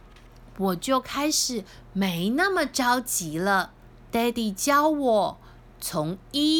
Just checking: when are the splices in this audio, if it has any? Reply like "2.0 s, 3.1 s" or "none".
4.1 s